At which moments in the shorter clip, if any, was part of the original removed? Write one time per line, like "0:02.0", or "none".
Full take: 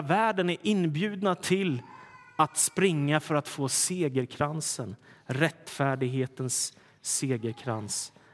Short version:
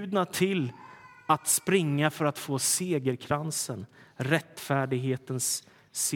none